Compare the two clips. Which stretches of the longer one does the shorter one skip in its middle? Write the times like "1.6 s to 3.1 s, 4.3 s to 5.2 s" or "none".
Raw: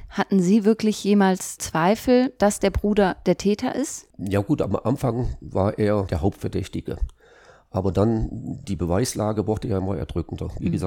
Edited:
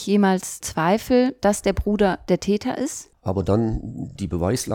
4.1 s to 7.6 s